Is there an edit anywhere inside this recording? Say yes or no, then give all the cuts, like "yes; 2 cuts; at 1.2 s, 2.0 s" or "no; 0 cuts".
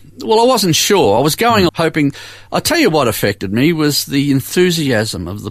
yes; 1 cut; at 1.7 s